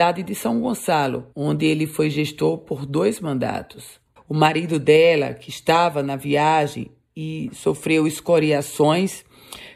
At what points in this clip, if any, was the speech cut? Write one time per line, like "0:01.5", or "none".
0:01.3
0:04.2